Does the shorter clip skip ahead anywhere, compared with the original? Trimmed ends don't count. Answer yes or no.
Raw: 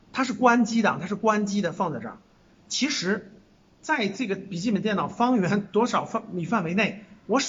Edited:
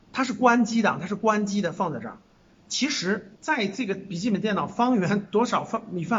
yes